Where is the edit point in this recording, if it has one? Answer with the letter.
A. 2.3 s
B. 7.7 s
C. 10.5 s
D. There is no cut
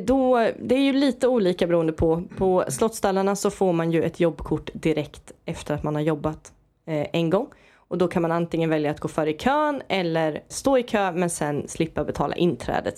C